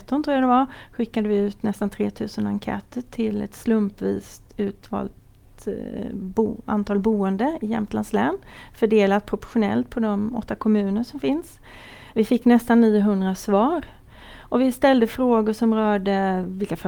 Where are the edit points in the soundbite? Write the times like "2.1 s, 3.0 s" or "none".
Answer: none